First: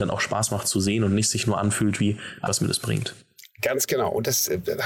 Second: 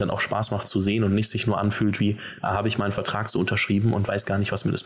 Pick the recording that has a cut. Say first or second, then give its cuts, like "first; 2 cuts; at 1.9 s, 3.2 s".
first; 1 cut; at 2.5 s